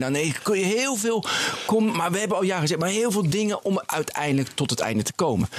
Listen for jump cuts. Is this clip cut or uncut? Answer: uncut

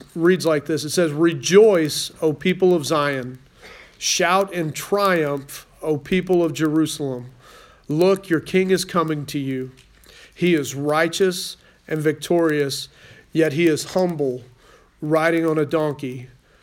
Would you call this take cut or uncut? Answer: uncut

